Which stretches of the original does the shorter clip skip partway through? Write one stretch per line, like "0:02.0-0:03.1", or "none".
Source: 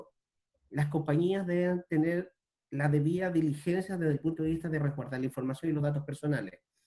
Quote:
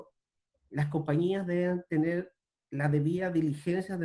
none